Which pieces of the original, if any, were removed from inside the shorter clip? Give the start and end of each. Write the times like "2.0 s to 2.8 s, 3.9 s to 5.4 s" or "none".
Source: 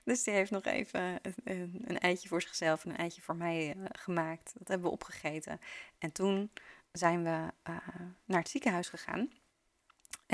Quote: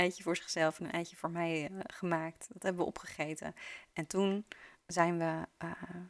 none